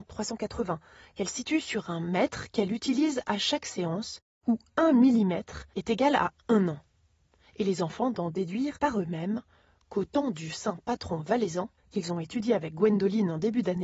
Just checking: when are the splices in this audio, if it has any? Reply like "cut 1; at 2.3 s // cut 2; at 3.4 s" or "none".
cut 1; at 11.8 s